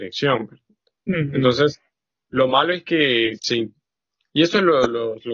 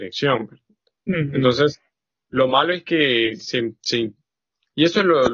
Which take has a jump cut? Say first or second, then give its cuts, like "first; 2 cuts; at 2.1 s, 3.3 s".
first; 1 cut; at 3.4 s